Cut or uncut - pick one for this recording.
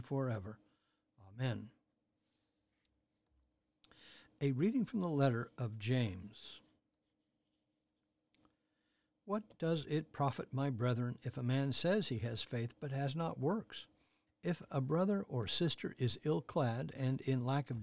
cut